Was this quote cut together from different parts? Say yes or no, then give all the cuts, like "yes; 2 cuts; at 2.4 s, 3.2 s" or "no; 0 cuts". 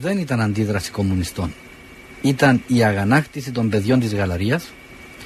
no; 0 cuts